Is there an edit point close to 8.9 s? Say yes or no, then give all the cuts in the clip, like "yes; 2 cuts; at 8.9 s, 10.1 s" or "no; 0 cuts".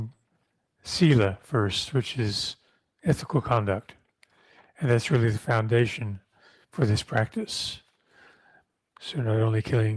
yes; 1 cut; at 8.9 s